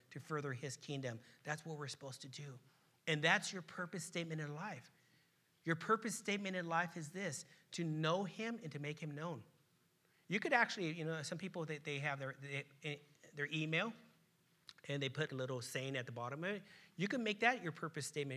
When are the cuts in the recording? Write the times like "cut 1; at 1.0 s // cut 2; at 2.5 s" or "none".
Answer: cut 1; at 15.3 s